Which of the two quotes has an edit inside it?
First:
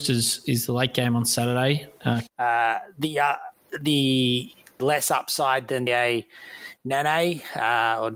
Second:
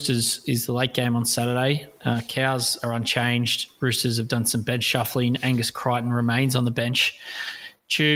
first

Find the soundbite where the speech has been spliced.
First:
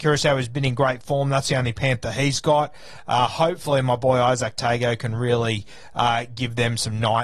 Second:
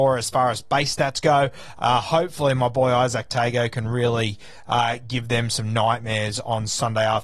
second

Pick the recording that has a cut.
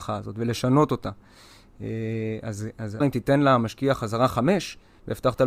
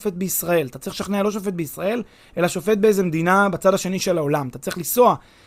first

